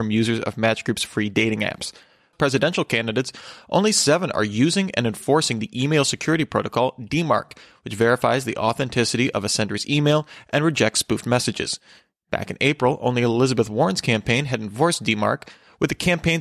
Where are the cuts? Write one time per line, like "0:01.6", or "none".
0:02.3